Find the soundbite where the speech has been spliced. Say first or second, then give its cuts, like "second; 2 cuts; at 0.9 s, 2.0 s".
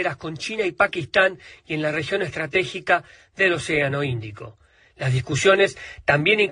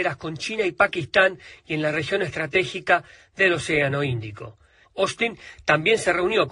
second; 1 cut; at 4.8 s